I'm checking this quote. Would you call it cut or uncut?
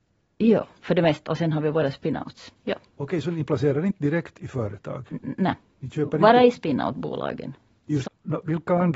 cut